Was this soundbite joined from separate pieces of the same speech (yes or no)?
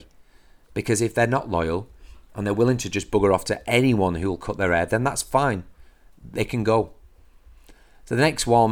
no